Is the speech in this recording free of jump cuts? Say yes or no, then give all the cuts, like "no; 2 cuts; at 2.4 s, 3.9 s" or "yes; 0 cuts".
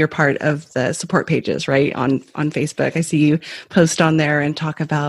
yes; 0 cuts